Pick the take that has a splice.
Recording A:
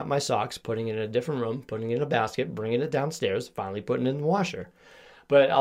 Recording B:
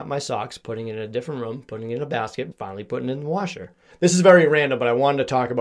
B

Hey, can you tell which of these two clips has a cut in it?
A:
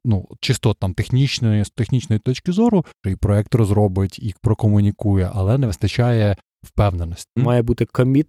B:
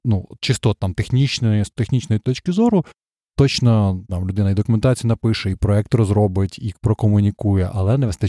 A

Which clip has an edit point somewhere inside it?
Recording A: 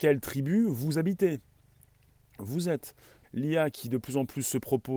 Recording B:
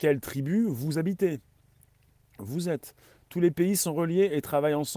A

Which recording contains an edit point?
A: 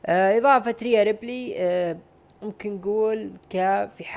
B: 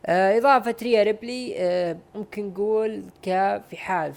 B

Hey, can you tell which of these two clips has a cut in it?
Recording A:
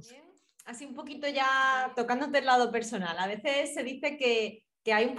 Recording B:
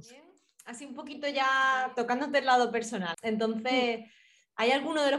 B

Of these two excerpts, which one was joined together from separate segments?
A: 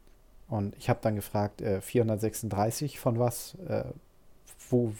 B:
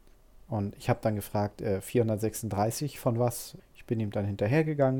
B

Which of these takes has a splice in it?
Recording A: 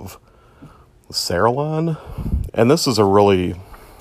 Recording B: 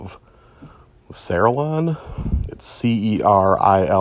A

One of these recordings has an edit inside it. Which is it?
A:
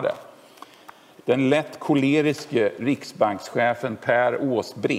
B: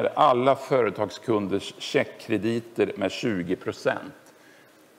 A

